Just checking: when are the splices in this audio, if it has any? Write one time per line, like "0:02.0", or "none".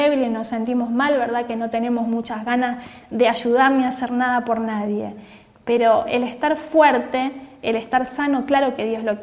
none